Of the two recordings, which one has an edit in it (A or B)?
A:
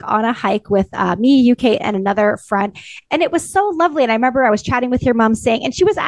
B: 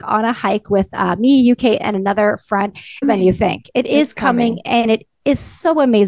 B